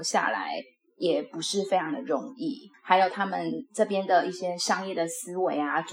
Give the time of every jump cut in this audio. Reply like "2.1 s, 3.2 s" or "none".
2.7 s

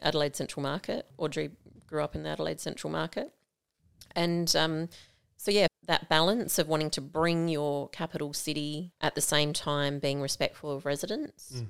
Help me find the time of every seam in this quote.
1.1 s, 5.7 s, 8.9 s

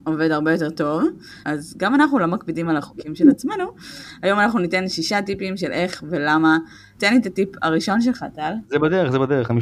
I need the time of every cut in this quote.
1.4 s, 7.0 s, 8.6 s

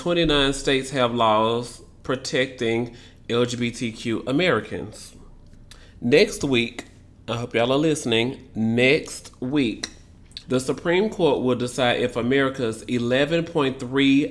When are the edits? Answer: 10.4 s

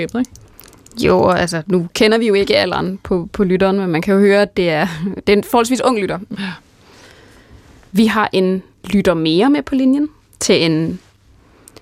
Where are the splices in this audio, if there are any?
6.3 s, 8.7 s

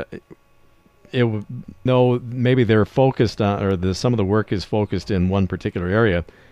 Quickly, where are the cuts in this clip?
1.9 s

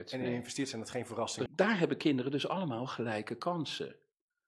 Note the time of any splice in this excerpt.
1.5 s

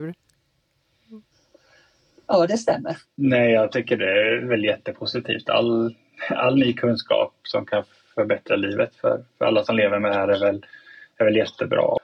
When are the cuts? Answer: 3.0 s

